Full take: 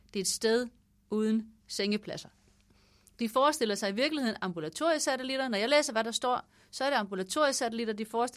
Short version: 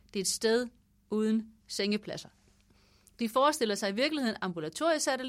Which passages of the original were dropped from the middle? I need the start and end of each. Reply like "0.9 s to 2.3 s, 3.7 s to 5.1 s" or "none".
none